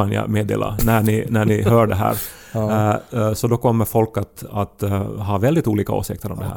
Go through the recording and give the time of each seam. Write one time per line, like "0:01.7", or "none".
none